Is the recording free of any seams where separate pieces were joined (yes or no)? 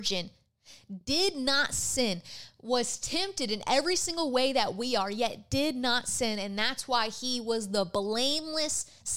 yes